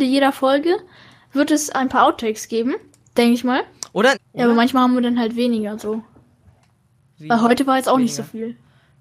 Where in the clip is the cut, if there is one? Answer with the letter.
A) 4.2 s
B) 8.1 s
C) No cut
A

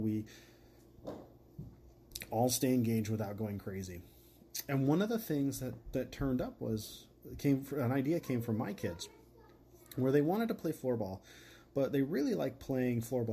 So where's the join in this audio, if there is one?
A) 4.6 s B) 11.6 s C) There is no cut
C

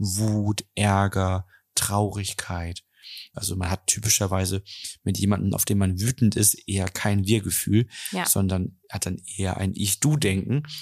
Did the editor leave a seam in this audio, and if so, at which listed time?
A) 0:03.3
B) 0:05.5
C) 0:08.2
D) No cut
A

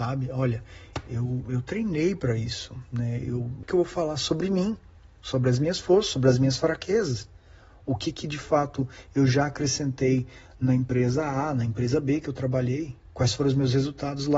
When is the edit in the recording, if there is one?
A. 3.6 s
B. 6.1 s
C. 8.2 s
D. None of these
A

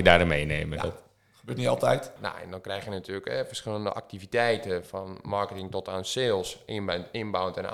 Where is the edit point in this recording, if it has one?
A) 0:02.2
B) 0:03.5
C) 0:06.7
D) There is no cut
A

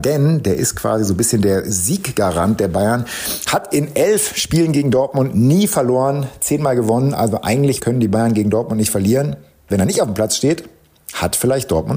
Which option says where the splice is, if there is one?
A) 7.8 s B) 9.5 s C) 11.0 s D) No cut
A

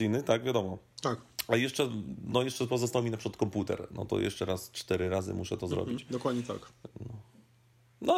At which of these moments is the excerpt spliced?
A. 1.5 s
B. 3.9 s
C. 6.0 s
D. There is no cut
D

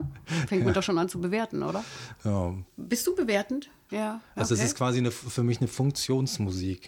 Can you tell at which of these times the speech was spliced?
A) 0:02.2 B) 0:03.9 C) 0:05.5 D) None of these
B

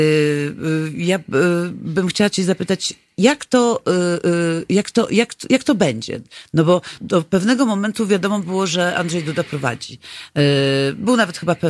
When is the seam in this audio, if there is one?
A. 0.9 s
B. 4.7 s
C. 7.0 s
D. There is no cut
C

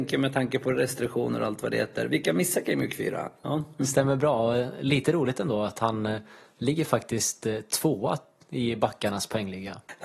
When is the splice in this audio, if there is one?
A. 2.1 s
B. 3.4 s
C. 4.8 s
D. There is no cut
B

